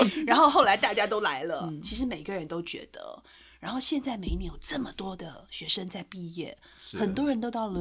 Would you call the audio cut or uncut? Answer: uncut